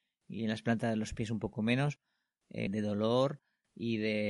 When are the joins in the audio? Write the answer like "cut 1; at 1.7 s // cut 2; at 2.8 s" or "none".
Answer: cut 1; at 2.7 s